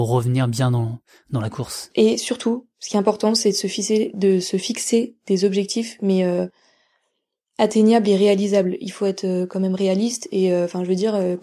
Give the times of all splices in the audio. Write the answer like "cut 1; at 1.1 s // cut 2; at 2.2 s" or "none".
cut 1; at 1.9 s

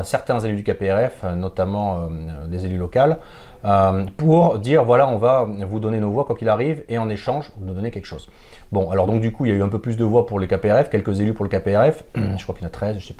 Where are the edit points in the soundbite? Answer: none

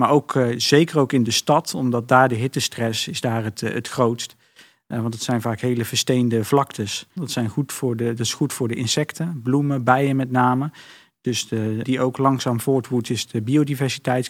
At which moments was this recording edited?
cut 1; at 7.2 s // cut 2; at 11.8 s

